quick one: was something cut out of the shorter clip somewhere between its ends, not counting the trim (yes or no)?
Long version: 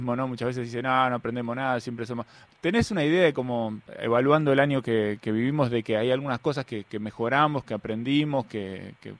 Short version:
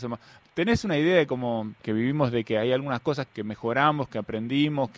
yes